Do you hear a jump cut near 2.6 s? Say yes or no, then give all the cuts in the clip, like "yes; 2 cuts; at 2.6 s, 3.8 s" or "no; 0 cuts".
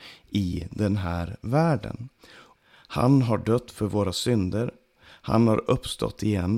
yes; 1 cut; at 2.6 s